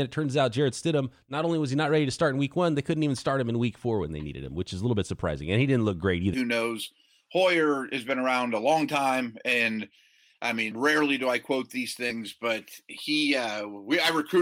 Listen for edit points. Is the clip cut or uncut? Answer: cut